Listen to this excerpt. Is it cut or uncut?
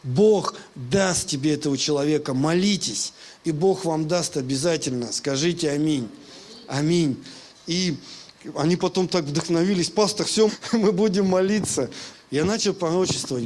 cut